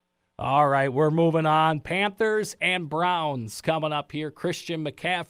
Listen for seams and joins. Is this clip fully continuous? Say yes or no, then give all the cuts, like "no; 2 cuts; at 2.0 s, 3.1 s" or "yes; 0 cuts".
yes; 0 cuts